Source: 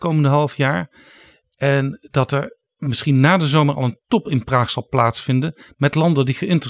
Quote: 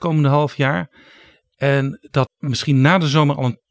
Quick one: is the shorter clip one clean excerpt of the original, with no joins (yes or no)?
no